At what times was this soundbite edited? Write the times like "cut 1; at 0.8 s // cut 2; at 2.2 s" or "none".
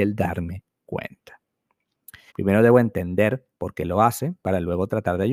cut 1; at 2.3 s